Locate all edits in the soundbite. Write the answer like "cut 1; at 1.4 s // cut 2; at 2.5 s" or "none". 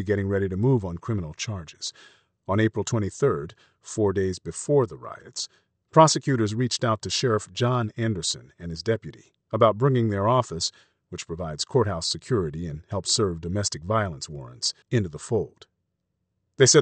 cut 1; at 9.4 s // cut 2; at 14.8 s